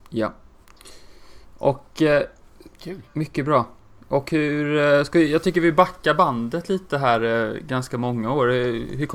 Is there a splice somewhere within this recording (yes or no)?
no